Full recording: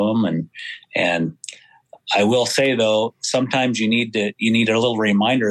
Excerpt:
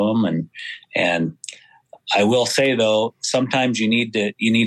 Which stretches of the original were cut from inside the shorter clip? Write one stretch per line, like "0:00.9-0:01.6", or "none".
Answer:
none